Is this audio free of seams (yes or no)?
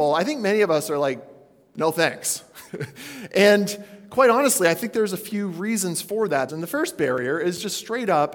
no